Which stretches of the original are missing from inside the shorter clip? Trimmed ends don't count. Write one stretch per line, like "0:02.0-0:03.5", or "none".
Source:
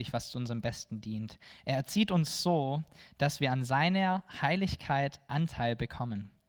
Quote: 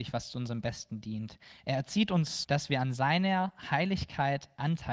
0:02.4-0:03.1